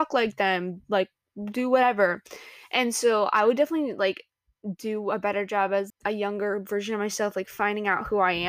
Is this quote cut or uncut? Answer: cut